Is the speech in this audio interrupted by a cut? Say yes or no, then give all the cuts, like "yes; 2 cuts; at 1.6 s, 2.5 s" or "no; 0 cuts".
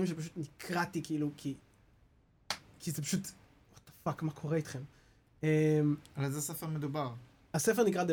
no; 0 cuts